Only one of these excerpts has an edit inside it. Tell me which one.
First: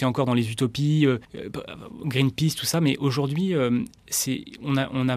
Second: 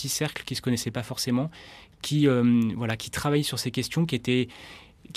first; 1 cut; at 1.2 s

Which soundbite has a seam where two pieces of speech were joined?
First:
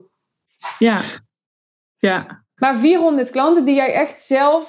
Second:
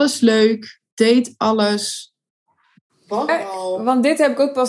second; 1 cut; at 3.3 s

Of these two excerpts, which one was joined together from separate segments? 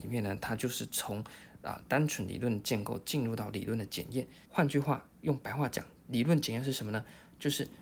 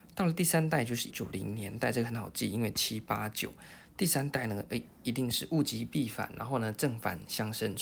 second; 1 cut; at 1.1 s

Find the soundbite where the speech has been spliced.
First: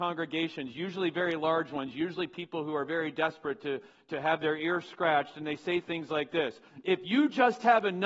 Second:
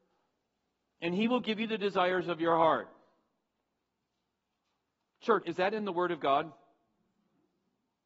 second; 1 cut; at 5.4 s

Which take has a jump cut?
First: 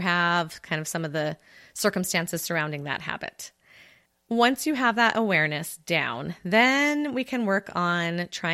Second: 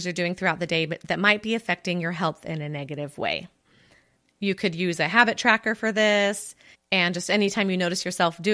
second; 1 cut; at 6.7 s

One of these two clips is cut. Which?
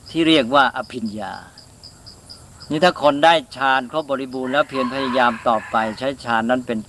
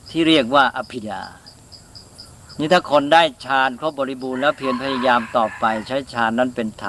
second; 1 cut; at 1.0 s

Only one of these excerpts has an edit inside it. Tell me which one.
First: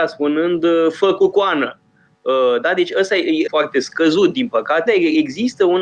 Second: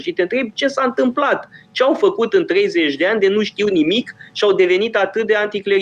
first; 2 cuts; at 3.5 s, 4.9 s

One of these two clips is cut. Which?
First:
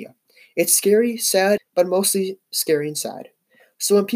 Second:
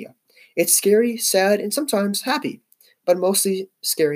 first; 1 cut; at 1.6 s

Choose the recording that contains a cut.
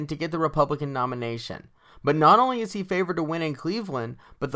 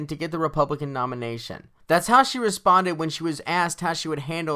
second; 1 cut; at 1.8 s

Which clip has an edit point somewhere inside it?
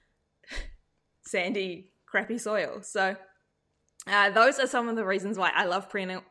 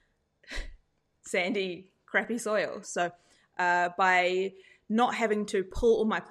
second; 1 cut; at 2.8 s

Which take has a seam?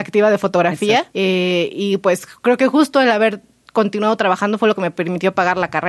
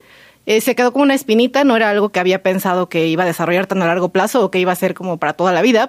first; 1 cut; at 1.1 s

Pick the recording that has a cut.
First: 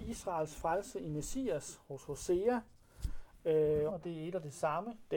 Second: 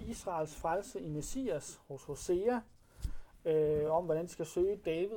first; 1 cut; at 3.9 s

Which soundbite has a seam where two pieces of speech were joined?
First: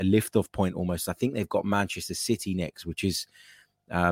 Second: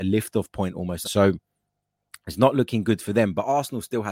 second; 1 cut; at 1.0 s

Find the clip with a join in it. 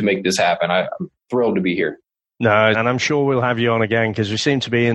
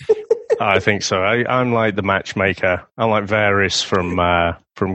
first; 1 cut; at 2.7 s

